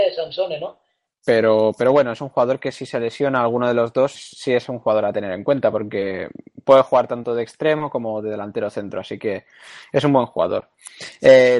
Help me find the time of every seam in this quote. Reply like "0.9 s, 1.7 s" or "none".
1.1 s, 4.1 s